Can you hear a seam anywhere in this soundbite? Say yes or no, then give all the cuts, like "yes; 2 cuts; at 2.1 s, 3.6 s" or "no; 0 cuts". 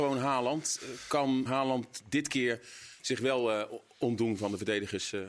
yes; 1 cut; at 1.5 s